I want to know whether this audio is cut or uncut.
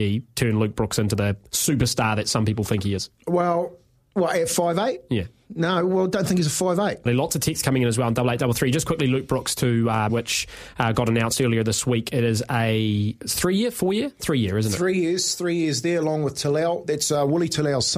cut